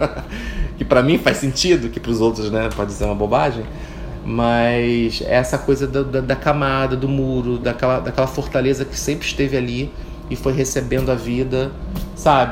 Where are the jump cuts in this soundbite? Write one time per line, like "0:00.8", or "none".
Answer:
none